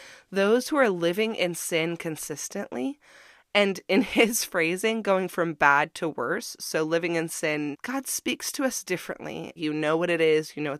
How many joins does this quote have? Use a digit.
2